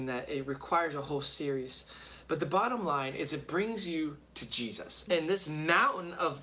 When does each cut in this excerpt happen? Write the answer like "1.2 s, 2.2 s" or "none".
5.1 s